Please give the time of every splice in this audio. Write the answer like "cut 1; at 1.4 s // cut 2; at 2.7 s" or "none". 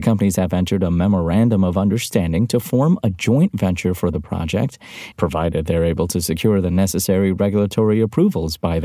cut 1; at 5.1 s